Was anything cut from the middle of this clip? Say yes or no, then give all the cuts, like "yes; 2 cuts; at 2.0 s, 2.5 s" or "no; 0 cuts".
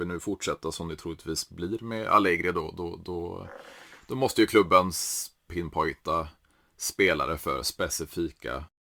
yes; 1 cut; at 5.5 s